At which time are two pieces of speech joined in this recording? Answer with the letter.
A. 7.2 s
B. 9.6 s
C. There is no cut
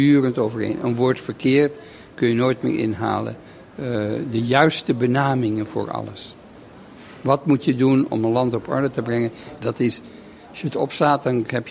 B